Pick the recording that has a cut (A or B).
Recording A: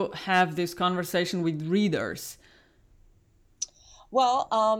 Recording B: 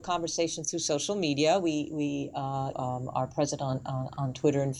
B